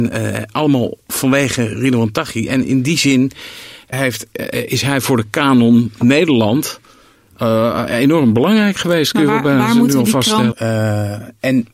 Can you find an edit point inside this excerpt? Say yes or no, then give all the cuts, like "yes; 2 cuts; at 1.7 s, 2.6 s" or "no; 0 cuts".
yes; 2 cuts; at 3.9 s, 10.5 s